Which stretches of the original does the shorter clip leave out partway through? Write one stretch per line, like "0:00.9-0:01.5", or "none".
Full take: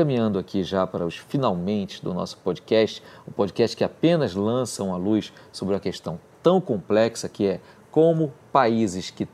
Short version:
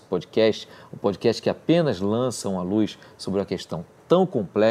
none